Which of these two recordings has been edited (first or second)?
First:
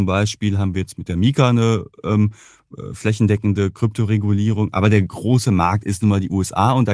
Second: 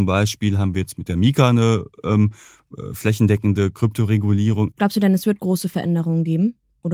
second